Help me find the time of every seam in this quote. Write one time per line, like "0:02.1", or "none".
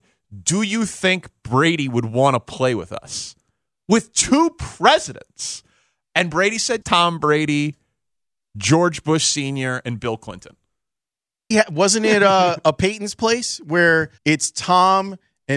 0:06.8
0:11.5
0:14.2